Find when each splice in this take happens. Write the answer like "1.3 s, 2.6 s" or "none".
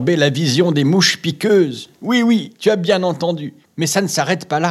3.7 s